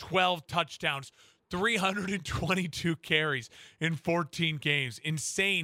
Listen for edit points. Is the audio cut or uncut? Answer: uncut